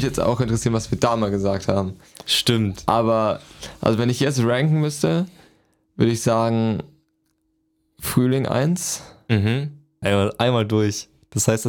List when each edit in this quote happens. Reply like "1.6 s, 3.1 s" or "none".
10.0 s